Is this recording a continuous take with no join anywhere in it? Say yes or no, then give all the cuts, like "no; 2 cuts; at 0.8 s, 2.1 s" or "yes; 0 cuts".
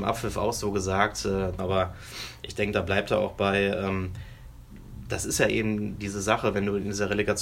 no; 1 cut; at 1.6 s